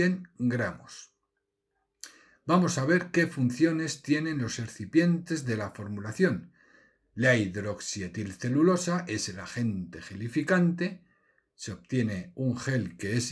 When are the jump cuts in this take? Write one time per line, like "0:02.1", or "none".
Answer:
none